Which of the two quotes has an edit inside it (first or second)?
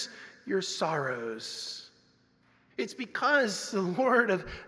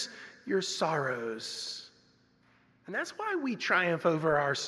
first